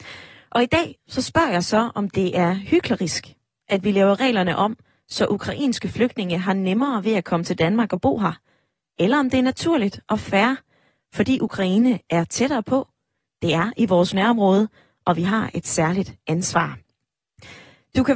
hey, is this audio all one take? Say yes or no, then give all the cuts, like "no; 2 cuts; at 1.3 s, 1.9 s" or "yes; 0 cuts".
yes; 0 cuts